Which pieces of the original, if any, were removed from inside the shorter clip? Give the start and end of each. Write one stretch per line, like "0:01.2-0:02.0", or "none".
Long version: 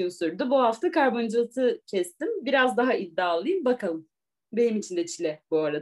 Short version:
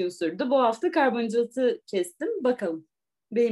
0:02.4-0:03.6